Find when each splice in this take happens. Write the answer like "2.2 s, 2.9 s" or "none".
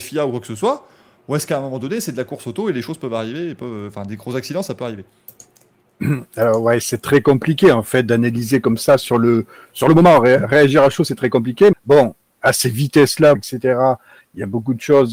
11.7 s, 13.4 s